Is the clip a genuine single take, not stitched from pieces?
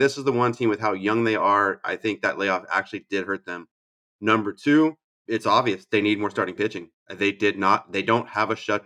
no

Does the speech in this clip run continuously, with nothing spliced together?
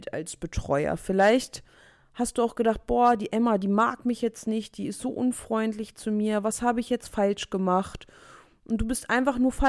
yes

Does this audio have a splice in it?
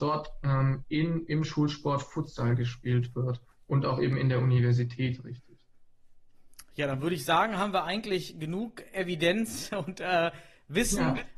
no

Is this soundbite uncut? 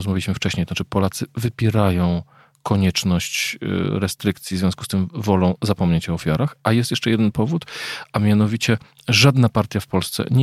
yes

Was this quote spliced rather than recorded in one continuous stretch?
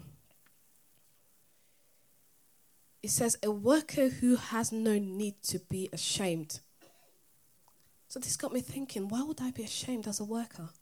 no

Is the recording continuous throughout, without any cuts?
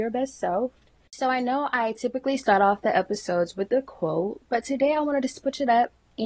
no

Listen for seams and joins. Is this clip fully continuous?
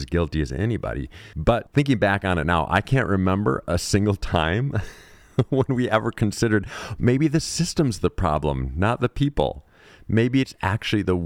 no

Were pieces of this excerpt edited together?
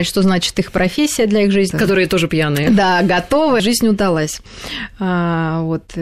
yes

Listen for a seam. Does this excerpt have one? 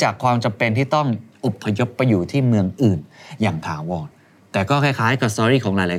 no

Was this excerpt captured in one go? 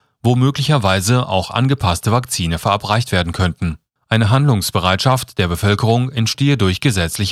no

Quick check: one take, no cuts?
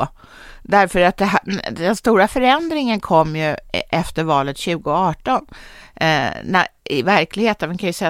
yes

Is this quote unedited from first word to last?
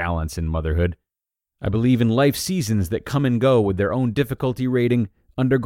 yes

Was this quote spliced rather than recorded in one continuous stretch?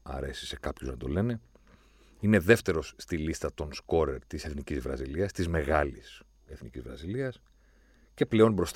no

